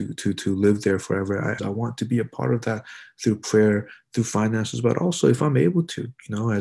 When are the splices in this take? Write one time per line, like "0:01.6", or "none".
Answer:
0:01.6